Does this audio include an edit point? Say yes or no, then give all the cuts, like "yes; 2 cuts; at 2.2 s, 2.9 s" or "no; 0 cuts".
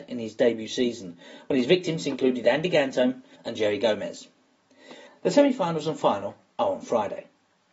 yes; 2 cuts; at 3.4 s, 5.1 s